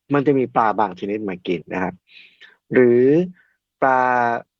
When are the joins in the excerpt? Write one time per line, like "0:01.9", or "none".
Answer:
0:01.6